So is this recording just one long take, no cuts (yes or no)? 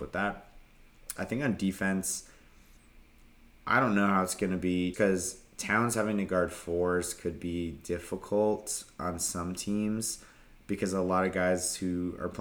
no